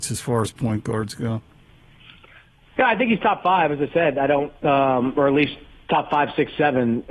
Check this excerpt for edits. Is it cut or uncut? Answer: uncut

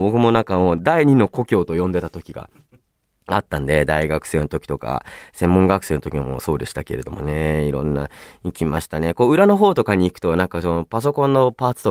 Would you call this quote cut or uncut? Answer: uncut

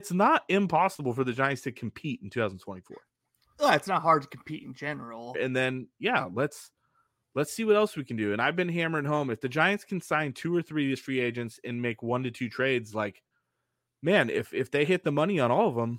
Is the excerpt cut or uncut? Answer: cut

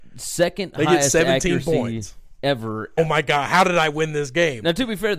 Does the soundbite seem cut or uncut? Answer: cut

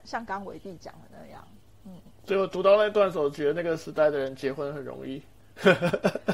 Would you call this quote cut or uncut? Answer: uncut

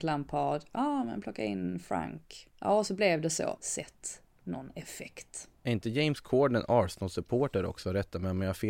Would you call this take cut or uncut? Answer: cut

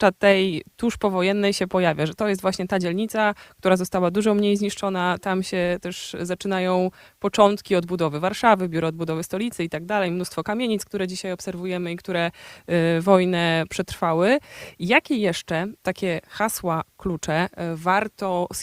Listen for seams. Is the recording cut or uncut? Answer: uncut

